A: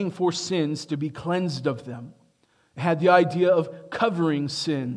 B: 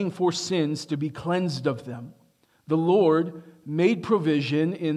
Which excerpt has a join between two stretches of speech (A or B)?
B